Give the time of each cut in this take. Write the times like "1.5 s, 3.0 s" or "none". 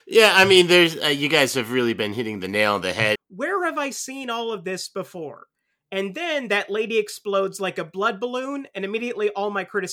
3.2 s